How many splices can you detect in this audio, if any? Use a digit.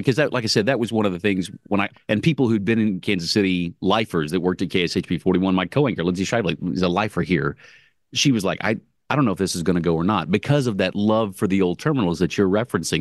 1